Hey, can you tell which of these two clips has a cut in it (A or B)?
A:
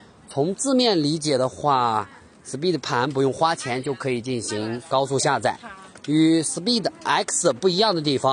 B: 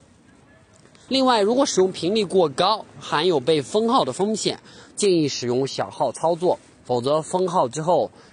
B